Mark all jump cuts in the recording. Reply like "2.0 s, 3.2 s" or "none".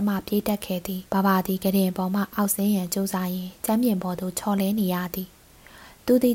1.1 s